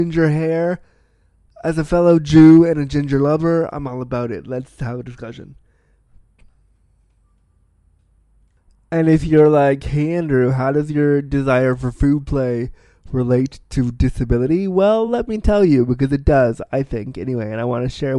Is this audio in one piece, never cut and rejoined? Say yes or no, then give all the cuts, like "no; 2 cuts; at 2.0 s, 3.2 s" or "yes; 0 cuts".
yes; 0 cuts